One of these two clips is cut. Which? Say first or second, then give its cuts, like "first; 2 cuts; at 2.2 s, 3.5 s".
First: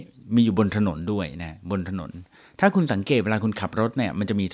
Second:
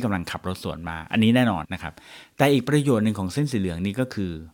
second; 1 cut; at 1.6 s